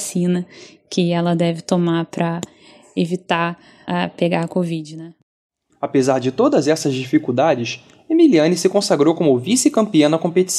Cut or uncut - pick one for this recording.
uncut